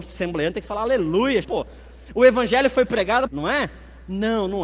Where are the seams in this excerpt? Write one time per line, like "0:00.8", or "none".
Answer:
0:01.4
0:03.3